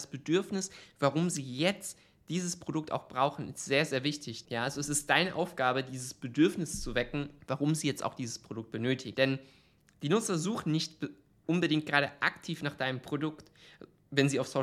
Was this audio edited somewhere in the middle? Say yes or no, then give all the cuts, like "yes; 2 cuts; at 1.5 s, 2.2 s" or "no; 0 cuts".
yes; 3 cuts; at 4.4 s, 7.4 s, 9.1 s